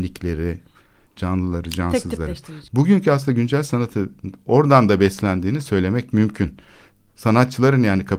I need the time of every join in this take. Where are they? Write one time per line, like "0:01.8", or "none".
0:01.1
0:02.7